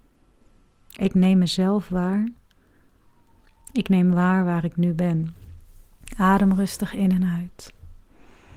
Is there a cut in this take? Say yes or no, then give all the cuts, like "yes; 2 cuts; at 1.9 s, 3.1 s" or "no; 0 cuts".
yes; 1 cut; at 1.0 s